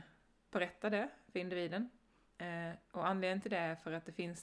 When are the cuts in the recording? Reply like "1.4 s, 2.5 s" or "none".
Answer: 2.2 s